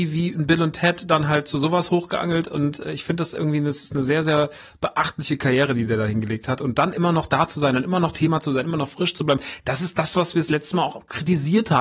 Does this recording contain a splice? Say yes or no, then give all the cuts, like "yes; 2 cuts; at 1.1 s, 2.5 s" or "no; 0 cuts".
no; 0 cuts